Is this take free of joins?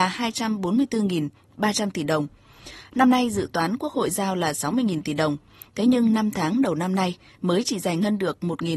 no; 1 cut; at 2.8 s

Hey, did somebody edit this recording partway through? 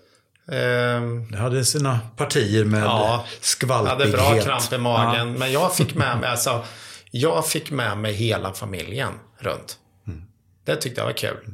no; 0 cuts

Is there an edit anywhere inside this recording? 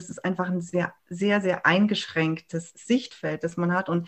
yes; 1 cut; at 1.0 s

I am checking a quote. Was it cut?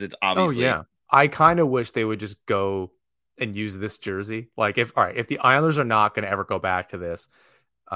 yes; 1 cut; at 1.0 s

